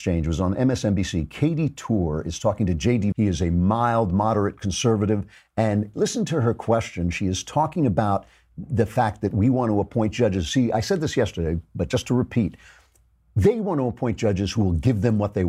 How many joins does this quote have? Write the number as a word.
one